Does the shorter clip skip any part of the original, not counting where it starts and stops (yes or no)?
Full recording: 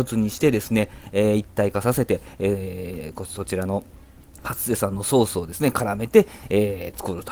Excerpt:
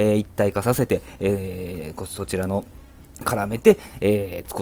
yes